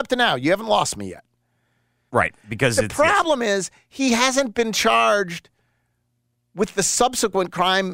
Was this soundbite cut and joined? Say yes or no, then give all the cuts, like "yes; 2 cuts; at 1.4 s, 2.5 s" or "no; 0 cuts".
yes; 1 cut; at 2.1 s